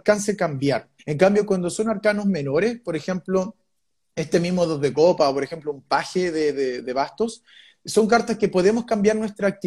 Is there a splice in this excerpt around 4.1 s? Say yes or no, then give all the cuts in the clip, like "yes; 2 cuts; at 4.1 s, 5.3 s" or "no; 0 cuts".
no; 1 cut; at 1.0 s